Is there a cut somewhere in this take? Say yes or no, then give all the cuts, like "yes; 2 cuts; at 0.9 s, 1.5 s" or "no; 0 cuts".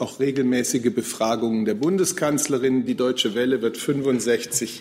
yes; 1 cut; at 2.9 s